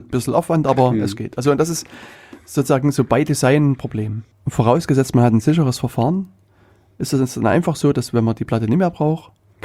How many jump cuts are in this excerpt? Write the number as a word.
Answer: one